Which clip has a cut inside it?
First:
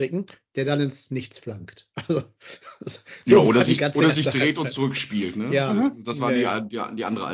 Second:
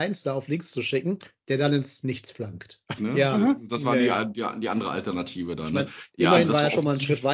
second; 1 cut; at 3.0 s

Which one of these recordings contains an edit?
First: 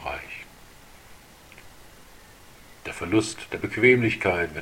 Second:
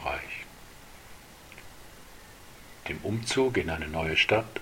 first; 1 cut; at 2.8 s

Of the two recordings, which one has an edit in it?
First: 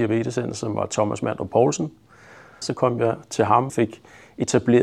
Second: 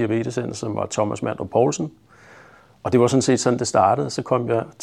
first; 2 cuts; at 2.6 s, 3.7 s

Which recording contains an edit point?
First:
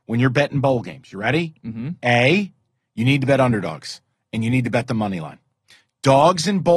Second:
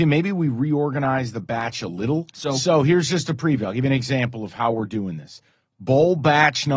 second; 1 cut; at 2.3 s

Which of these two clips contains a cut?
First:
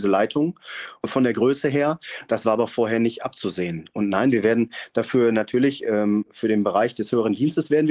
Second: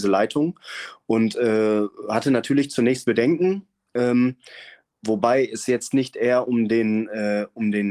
first; 1 cut; at 1.0 s

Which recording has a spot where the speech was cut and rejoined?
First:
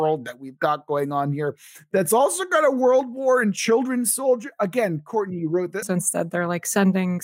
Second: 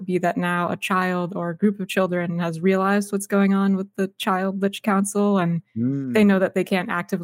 first; 1 cut; at 5.8 s

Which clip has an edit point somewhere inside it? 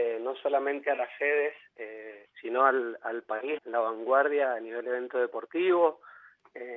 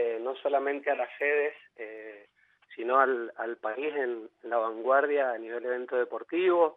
first; 2 cuts; at 2.3 s, 3.6 s

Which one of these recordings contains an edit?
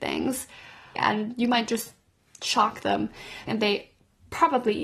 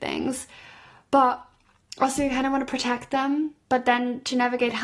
first; 2 cuts; at 1.0 s, 3.5 s

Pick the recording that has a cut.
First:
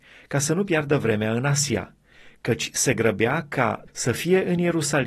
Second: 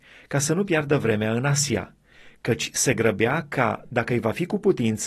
first; 1 cut; at 3.9 s

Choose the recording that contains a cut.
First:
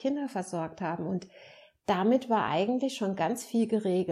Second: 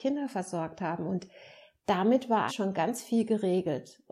second; 1 cut; at 2.5 s

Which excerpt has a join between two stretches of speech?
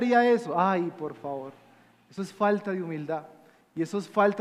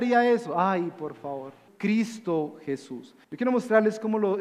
second; 2 cuts; at 1.7 s, 3.2 s

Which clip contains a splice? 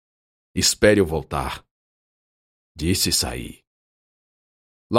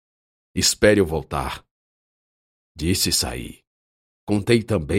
second; 1 cut; at 4.1 s

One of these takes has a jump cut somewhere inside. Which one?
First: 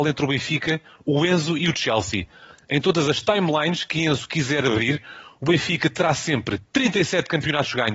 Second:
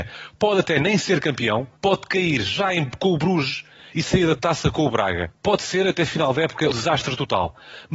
second; 1 cut; at 6.7 s

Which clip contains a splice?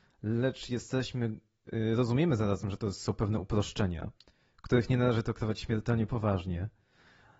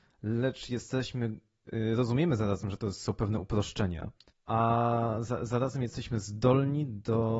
second; 1 cut; at 4.3 s

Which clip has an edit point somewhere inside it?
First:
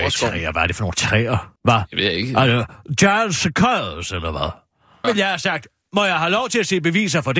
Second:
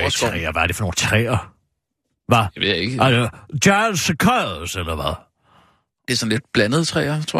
first; 2 cuts; at 1.6 s, 5.0 s

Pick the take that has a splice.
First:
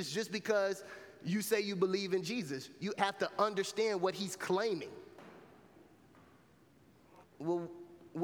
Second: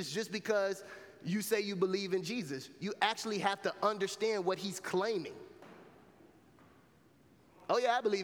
first; 2 cuts; at 3.0 s, 7.2 s

